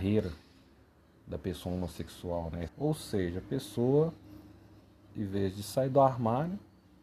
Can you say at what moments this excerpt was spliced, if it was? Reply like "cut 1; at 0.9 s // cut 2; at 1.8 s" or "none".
cut 1; at 2.7 s // cut 2; at 5.1 s